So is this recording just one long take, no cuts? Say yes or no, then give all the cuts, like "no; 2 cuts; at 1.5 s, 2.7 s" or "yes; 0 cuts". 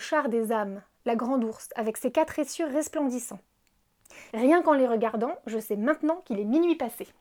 no; 1 cut; at 4.3 s